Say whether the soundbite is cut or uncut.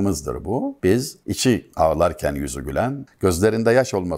cut